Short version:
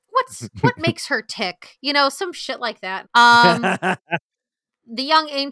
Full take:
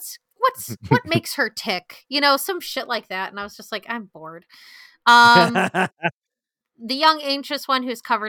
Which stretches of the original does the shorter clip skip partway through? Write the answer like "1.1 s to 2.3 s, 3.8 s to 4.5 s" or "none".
3.3 s to 4.9 s